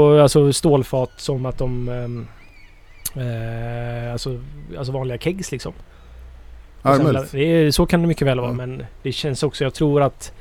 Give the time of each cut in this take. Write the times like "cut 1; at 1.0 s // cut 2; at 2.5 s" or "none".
none